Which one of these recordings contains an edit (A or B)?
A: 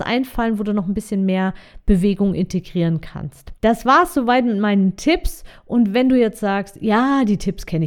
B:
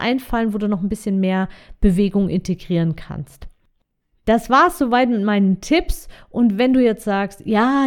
A